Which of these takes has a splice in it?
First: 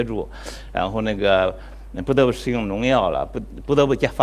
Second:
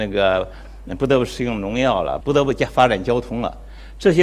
second; 1 cut; at 2.2 s

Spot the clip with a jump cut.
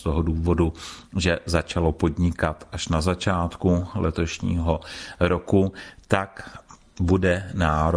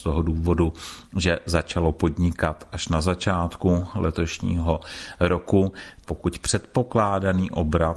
second; 1 cut; at 6.0 s

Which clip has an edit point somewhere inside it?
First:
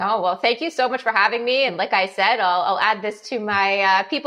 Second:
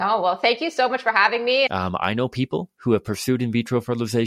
second; 1 cut; at 1.7 s

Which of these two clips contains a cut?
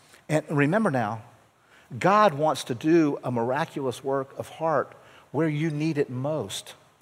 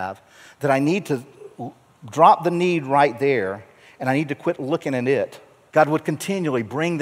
second; 1 cut; at 5.7 s

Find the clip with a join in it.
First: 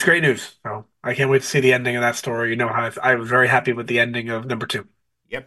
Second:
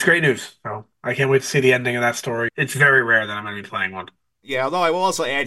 second; 1 cut; at 2.5 s

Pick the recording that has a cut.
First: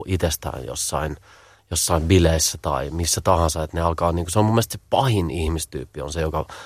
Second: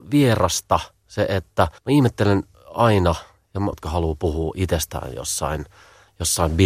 second; 2 cuts; at 1.8 s, 3.7 s

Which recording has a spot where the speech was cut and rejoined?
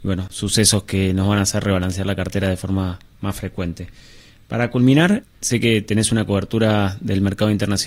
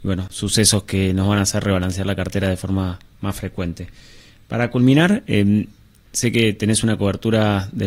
first; 1 cut; at 5.2 s

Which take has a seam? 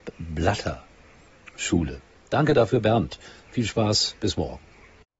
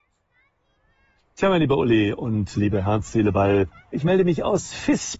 second; 1 cut; at 3.9 s

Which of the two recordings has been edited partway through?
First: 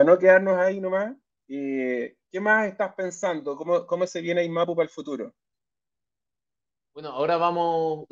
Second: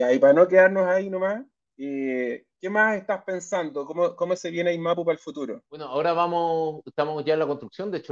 second; 1 cut; at 5.7 s

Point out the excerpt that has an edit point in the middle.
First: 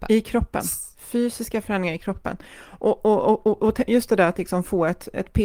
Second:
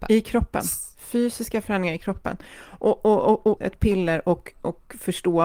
second; 1 cut; at 3.6 s

